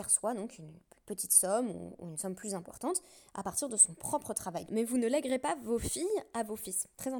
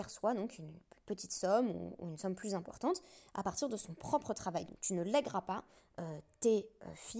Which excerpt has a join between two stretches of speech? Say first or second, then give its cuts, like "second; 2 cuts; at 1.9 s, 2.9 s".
first; 1 cut; at 4.7 s